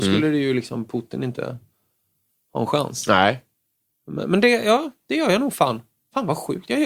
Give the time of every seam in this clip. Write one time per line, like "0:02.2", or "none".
none